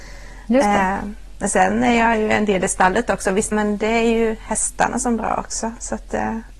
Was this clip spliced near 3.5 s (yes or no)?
yes